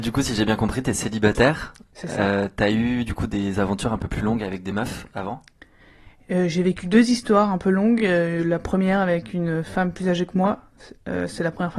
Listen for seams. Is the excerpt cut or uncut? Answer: uncut